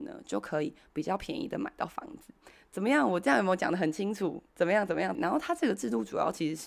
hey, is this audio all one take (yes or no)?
no